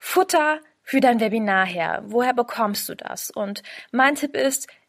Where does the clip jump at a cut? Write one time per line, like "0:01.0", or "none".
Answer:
none